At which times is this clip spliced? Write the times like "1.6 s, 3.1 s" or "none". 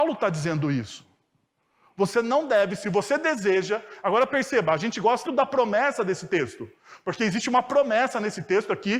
5.3 s